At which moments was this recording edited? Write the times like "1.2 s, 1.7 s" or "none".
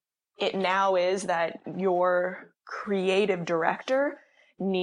2.6 s